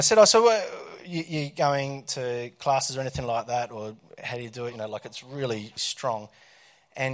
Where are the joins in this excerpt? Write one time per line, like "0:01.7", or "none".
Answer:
0:04.7
0:05.8